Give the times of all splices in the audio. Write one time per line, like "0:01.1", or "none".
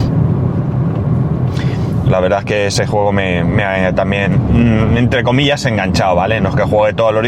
0:02.0